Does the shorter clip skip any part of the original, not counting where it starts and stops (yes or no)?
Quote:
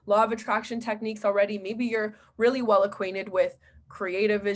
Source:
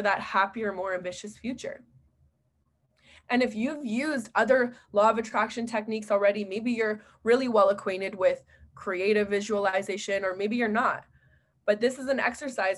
no